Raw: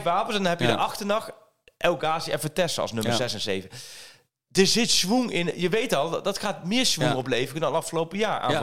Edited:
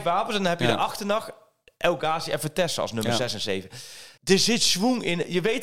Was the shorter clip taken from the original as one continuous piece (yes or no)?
no